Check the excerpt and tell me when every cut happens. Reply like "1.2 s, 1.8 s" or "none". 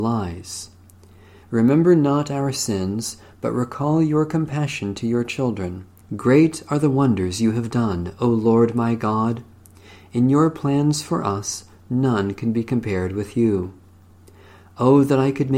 1.4 s, 6.0 s